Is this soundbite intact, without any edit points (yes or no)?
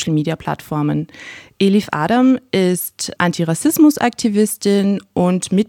no